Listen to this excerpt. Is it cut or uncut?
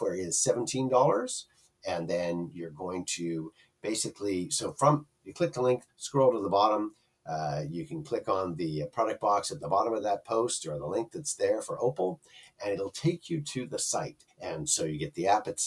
cut